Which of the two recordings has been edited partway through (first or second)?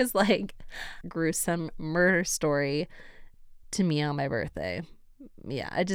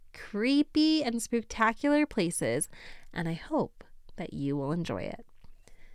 first